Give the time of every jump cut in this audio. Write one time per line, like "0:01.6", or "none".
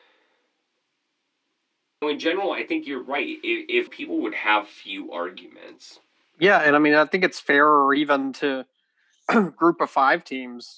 0:02.0
0:03.9